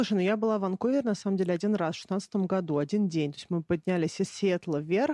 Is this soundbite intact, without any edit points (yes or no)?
yes